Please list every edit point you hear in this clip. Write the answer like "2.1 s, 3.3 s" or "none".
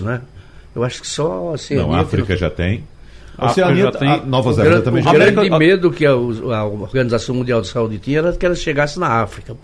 none